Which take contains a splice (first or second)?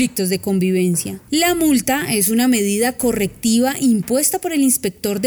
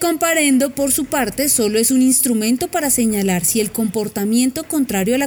first